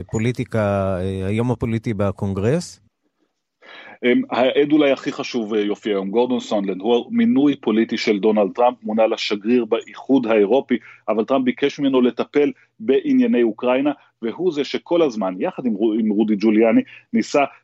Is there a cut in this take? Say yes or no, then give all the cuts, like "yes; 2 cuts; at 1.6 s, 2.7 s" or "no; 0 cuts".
no; 0 cuts